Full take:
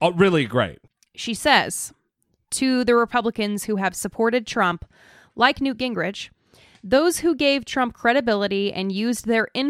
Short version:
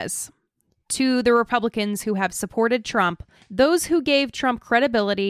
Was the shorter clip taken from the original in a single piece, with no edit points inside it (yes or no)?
no